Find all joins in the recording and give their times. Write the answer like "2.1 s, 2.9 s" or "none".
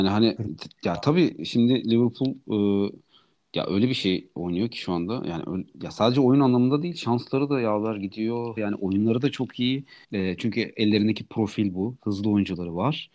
8.6 s, 10.0 s